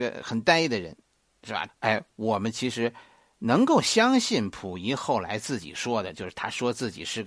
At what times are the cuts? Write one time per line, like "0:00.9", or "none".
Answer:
0:01.7